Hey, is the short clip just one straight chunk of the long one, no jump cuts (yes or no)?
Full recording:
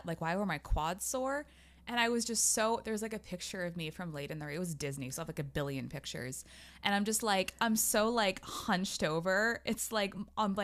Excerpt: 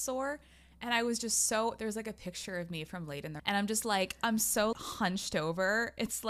no